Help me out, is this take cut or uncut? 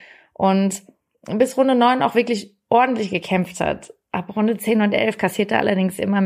uncut